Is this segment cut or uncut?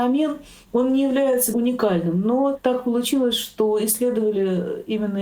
uncut